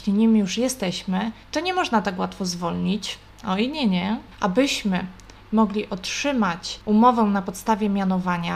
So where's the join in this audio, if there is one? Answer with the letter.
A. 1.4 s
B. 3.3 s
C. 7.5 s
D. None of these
A